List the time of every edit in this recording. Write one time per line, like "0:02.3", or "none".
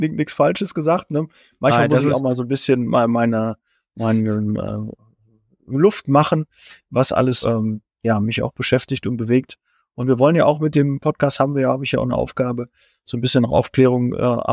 0:07.4

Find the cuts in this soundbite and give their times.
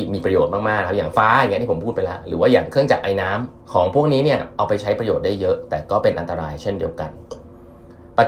0:01.1
0:03.6

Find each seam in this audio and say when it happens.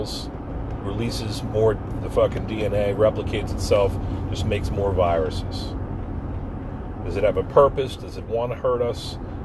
none

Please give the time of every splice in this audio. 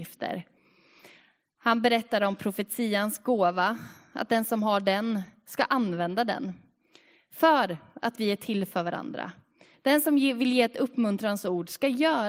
none

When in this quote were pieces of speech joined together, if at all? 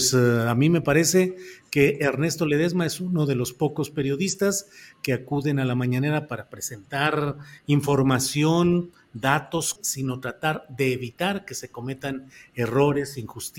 0:07.6
0:09.8

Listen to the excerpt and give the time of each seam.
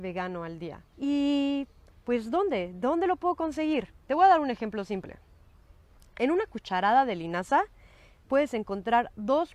0:00.9

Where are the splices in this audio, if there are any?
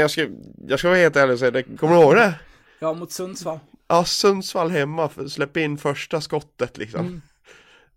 0:01.8

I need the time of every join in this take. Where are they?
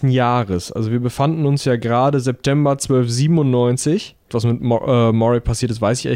0:04.3

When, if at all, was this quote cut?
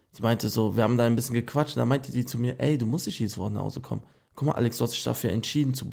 none

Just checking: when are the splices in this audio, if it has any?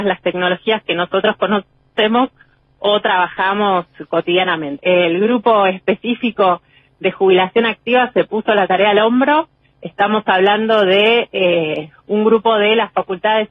0:04.8

